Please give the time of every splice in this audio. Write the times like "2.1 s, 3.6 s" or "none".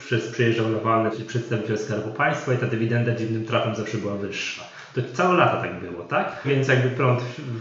1.1 s, 6.4 s